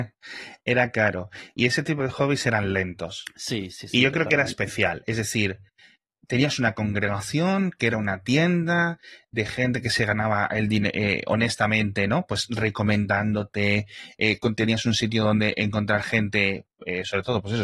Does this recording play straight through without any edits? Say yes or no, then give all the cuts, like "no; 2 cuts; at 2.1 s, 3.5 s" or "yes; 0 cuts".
yes; 0 cuts